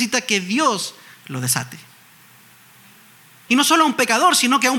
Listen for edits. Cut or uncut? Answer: cut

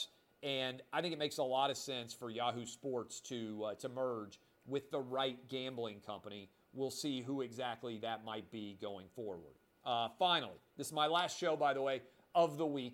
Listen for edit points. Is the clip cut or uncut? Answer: uncut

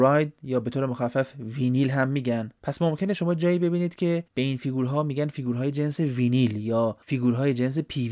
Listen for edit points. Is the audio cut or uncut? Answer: cut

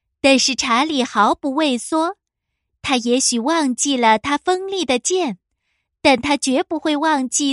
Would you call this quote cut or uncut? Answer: uncut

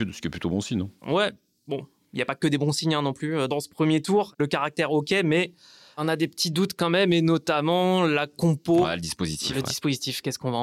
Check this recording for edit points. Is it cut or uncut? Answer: uncut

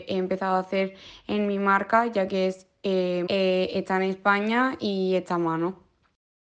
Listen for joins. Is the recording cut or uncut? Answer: cut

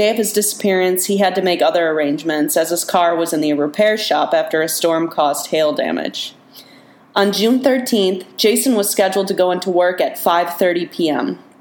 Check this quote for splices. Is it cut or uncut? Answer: cut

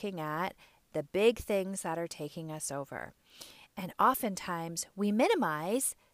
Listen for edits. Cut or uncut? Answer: uncut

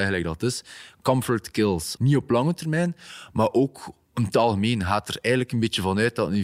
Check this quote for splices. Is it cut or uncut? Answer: cut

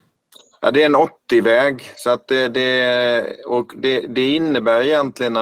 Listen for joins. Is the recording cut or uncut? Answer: uncut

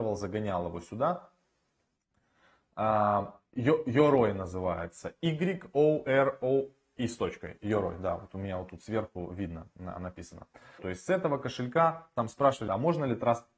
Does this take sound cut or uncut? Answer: cut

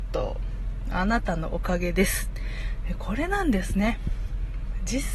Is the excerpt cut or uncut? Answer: uncut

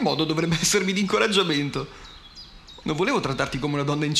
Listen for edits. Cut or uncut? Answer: cut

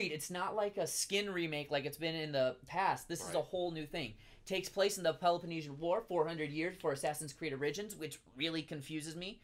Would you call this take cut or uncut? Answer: uncut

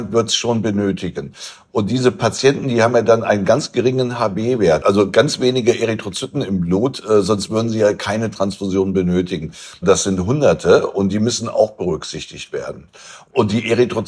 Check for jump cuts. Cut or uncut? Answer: cut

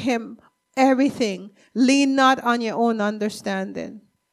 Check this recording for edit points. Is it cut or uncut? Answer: uncut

